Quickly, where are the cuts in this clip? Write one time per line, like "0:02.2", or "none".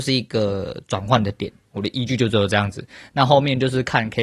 0:01.6